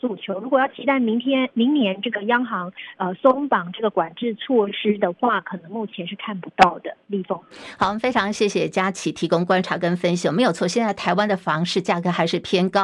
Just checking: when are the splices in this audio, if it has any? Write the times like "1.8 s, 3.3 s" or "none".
none